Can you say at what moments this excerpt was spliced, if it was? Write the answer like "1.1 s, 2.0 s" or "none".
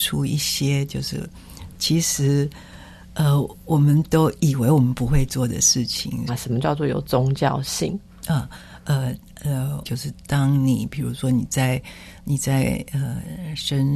6.3 s, 9.8 s